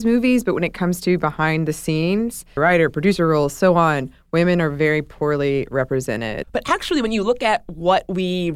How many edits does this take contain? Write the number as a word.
two